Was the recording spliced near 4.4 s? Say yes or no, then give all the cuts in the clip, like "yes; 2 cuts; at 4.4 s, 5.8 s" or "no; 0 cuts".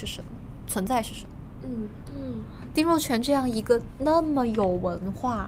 no; 1 cut; at 2.1 s